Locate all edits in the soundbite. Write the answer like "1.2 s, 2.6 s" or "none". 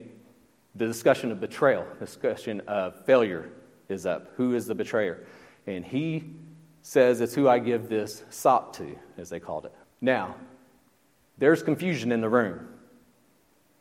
9.8 s

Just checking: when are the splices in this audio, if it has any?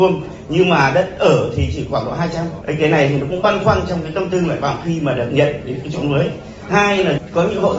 2.6 s

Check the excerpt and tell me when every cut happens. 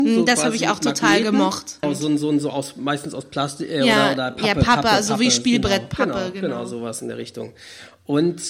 1.8 s

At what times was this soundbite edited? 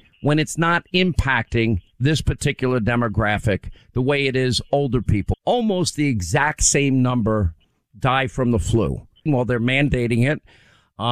5.3 s, 9.3 s

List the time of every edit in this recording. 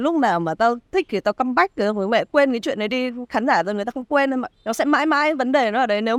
4.5 s

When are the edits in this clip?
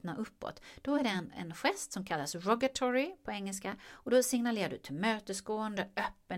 none

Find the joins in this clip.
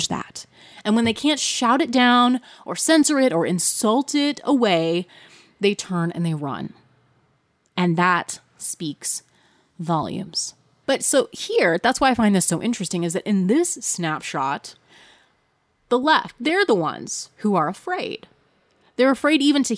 10.8 s

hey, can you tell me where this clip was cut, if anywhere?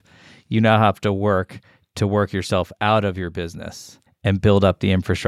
4.1 s

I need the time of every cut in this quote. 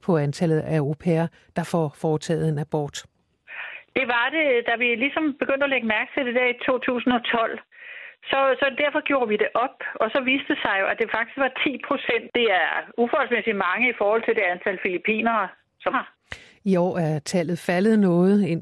15.9 s

